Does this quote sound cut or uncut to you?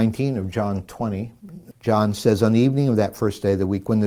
cut